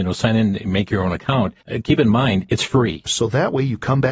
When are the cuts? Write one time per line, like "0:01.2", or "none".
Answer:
0:01.6
0:03.1